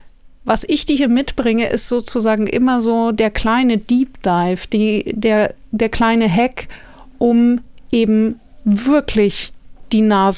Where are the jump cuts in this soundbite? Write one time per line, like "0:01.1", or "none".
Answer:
none

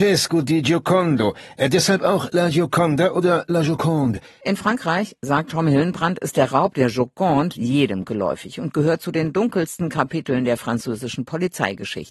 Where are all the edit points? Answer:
none

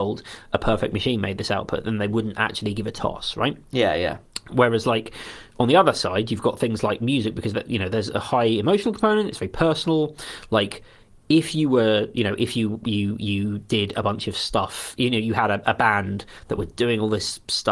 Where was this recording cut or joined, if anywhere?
none

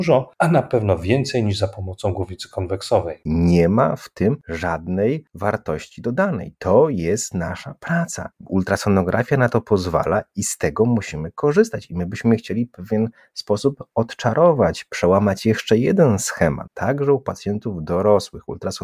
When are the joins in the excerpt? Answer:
0:03.3
0:16.7

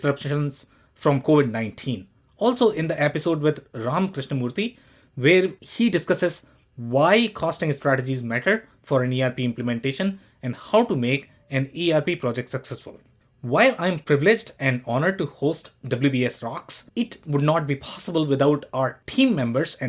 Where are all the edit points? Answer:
none

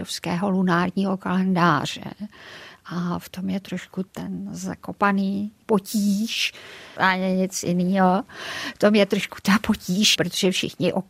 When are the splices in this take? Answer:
0:07.0

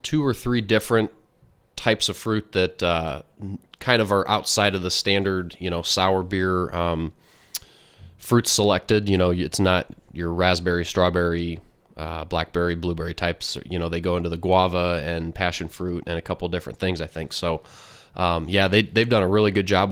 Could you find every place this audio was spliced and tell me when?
none

